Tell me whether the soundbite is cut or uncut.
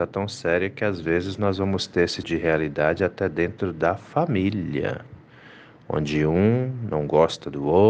cut